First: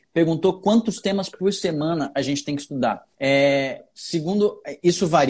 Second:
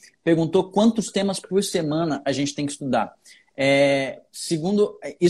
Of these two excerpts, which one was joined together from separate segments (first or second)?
first